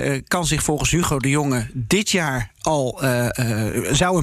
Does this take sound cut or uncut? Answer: uncut